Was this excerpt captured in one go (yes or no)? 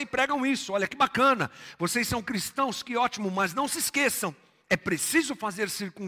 yes